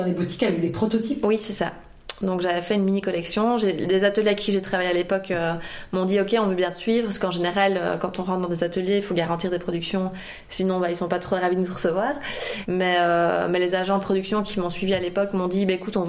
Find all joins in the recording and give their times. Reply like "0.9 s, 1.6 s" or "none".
12.6 s